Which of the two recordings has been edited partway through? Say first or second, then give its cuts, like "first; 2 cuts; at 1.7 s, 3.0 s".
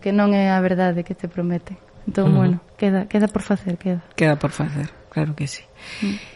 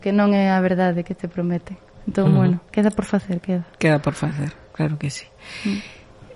second; 1 cut; at 2.7 s